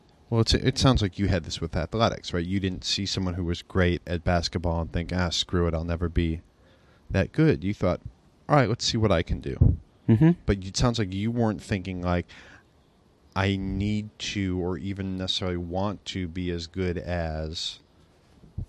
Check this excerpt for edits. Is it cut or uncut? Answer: uncut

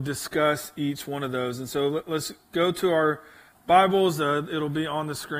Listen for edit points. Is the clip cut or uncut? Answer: uncut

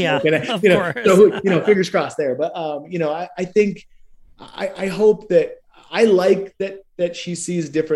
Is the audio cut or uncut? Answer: uncut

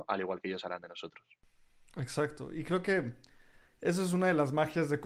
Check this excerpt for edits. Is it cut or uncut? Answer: uncut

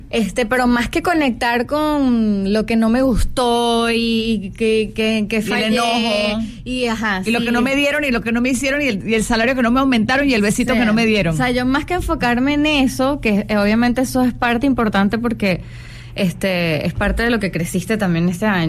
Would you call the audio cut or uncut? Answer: uncut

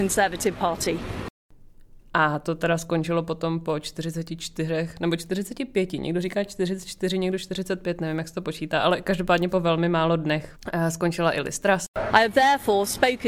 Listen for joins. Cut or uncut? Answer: cut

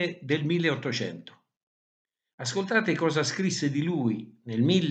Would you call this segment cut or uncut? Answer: cut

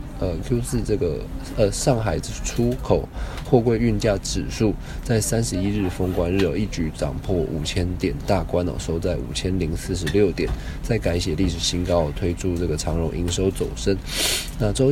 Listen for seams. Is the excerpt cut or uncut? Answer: uncut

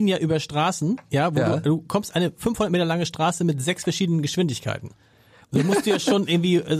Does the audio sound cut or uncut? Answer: uncut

